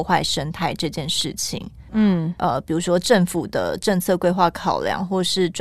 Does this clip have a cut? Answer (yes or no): yes